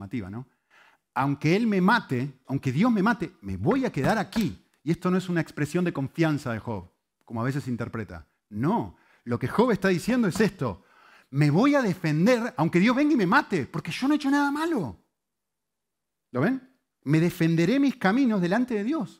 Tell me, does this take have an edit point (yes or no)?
yes